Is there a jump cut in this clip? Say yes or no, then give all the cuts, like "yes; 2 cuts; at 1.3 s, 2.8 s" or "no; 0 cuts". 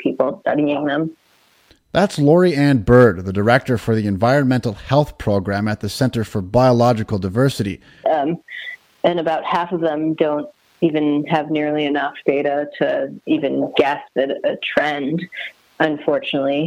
yes; 1 cut; at 8.0 s